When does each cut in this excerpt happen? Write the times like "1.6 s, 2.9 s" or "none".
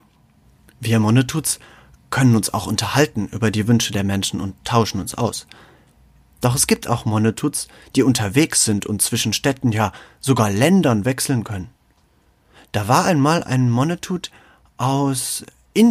6.2 s